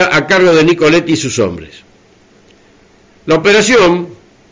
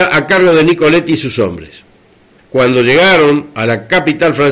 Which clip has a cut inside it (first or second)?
second